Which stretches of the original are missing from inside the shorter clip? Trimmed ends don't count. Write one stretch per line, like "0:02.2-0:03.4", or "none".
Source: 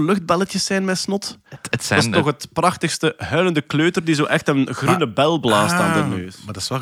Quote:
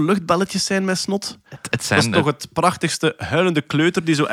none